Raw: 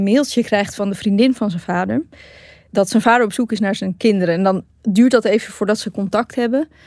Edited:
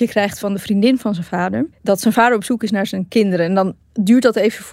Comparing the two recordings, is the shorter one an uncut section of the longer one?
no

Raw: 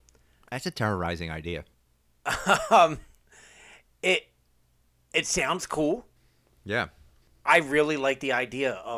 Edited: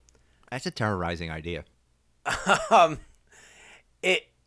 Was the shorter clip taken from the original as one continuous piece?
yes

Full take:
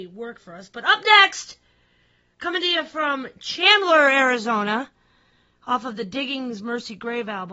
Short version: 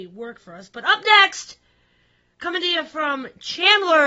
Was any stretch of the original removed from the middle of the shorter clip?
no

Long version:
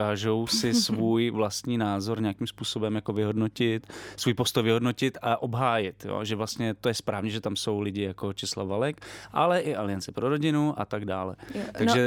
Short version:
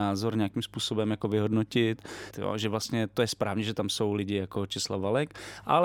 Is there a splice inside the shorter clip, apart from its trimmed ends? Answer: yes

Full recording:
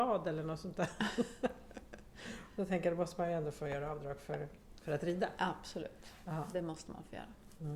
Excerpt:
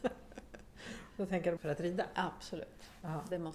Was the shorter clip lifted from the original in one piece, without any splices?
no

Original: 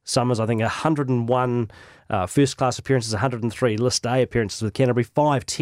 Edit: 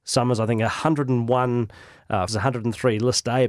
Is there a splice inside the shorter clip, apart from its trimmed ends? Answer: yes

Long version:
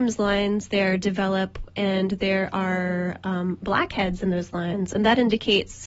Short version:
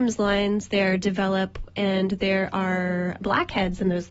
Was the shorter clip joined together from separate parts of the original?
yes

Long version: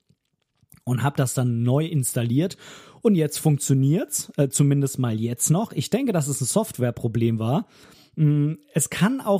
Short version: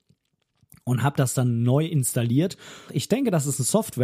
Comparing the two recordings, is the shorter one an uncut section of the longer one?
no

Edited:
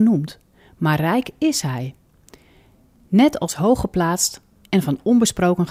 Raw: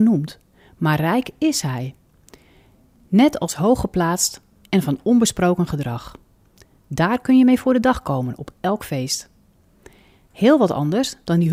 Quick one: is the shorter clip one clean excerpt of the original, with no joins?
yes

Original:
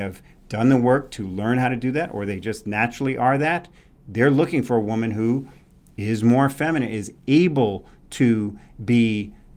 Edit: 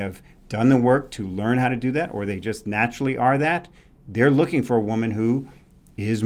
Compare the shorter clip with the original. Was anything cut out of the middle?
no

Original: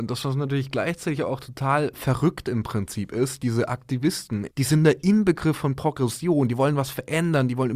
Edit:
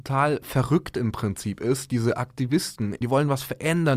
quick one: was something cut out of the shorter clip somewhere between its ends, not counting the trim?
yes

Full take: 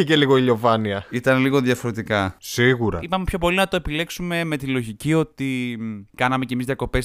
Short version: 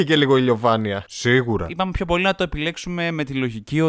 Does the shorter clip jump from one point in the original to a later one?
yes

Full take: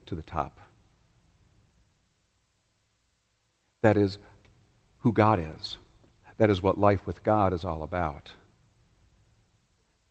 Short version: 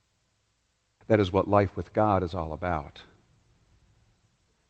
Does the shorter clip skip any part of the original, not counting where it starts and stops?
yes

